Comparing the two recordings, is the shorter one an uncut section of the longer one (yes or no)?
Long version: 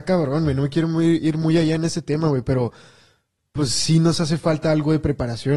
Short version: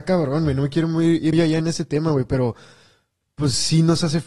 no